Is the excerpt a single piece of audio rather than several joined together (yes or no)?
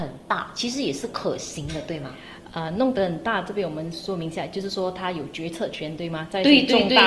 yes